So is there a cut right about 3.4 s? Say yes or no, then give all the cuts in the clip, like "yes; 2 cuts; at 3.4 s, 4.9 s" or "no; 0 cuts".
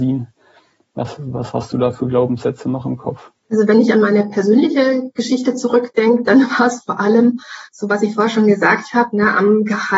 yes; 1 cut; at 3.4 s